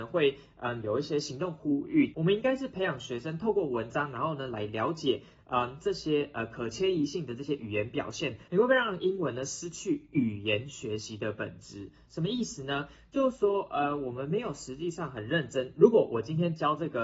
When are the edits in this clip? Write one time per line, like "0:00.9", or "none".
0:02.1
0:08.5